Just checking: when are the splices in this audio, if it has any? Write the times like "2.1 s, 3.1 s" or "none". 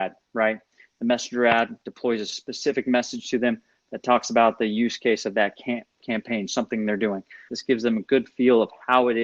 7.5 s

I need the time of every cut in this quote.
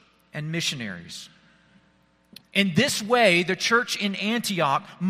2.4 s

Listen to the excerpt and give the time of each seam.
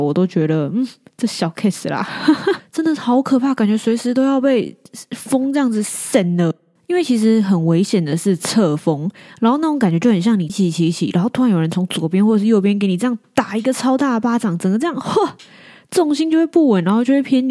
2.6 s, 10.5 s

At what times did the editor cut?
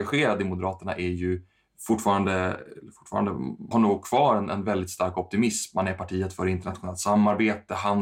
3.7 s

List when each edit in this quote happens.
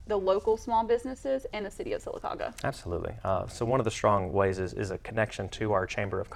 none

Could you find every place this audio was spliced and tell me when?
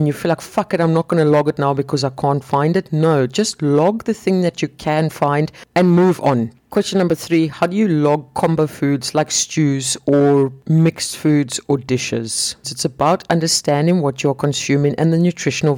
6.5 s, 12.6 s

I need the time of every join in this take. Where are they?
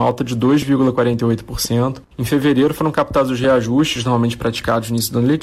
2.1 s

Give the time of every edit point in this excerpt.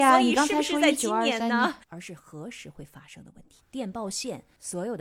1.8 s, 3.6 s

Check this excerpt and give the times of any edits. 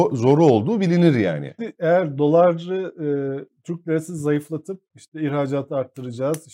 1.6 s, 4.9 s

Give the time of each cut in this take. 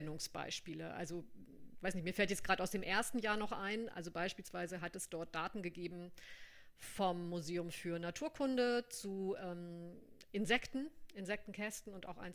none

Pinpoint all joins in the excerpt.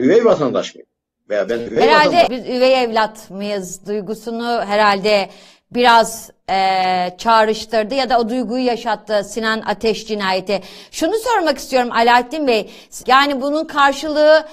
2.3 s, 13.0 s

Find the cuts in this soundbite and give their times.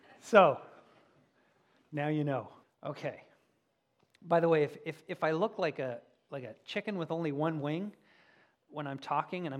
2.6 s

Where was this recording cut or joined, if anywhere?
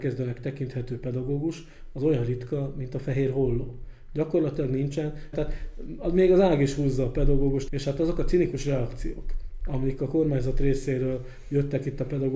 5.3 s, 7.7 s

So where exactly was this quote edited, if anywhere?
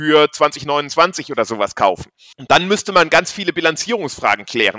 2.3 s

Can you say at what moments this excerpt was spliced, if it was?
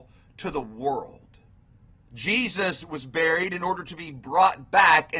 2.1 s

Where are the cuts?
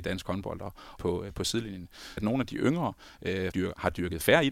1.0 s, 2.2 s, 3.5 s

